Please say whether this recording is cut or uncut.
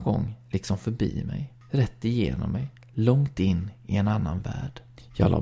uncut